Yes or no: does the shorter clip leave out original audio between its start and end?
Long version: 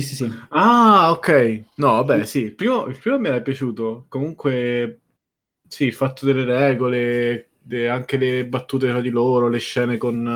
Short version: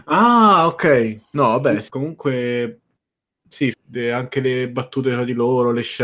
yes